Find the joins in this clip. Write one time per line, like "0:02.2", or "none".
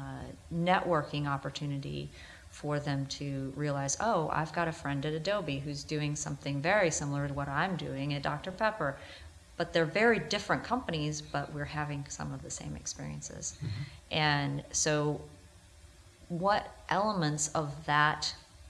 none